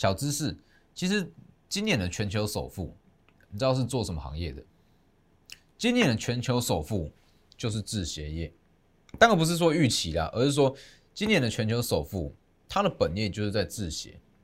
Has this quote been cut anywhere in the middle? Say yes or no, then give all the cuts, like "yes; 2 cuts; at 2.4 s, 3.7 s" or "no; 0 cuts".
no; 0 cuts